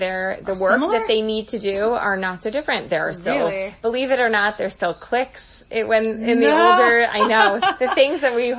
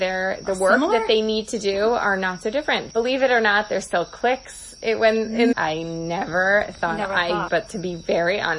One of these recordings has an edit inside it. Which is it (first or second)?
second